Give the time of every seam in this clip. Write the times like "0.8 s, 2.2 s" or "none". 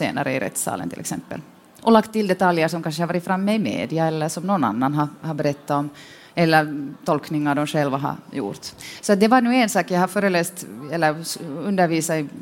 none